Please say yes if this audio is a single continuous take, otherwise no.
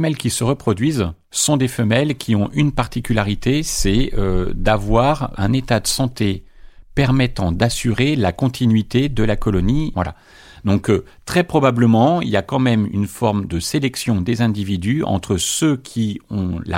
yes